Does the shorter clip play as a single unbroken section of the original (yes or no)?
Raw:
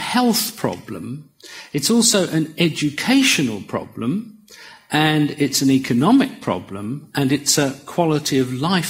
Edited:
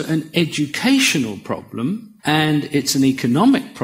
no